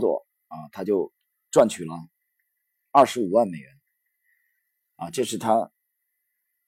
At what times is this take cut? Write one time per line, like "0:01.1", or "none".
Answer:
none